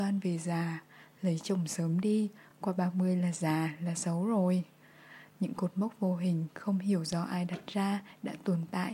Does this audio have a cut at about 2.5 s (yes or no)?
no